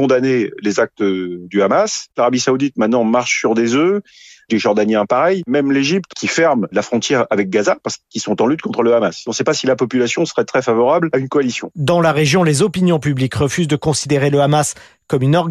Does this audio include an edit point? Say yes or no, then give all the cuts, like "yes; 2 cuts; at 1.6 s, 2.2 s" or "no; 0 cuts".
yes; 1 cut; at 2.1 s